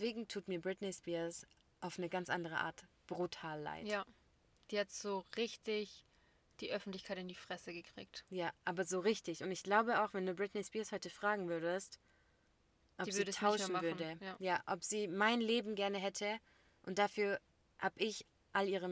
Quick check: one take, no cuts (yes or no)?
yes